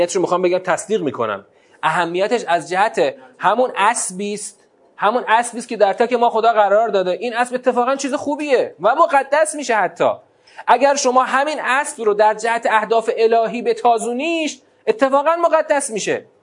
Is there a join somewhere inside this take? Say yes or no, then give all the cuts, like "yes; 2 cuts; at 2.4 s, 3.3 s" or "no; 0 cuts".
yes; 1 cut; at 6.0 s